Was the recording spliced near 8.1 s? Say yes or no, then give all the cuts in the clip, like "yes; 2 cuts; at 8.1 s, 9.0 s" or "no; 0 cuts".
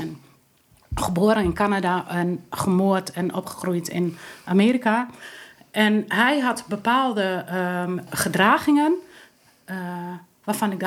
yes; 1 cut; at 8.1 s